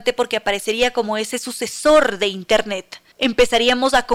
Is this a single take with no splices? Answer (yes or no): no